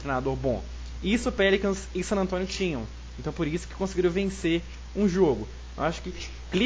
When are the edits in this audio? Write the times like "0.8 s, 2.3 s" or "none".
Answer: none